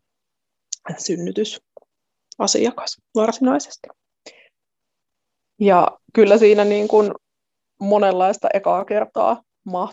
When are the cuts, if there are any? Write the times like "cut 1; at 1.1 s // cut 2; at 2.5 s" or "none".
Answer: none